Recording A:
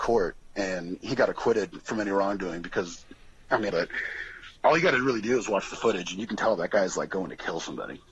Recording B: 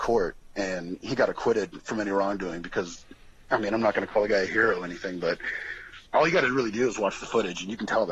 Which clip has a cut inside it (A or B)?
A